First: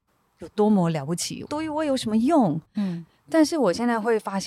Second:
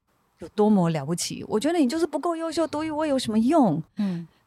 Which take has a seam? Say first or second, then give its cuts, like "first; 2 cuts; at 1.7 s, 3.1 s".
first; 1 cut; at 1.5 s